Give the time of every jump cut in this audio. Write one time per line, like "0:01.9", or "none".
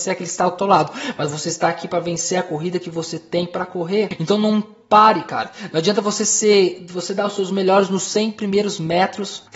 none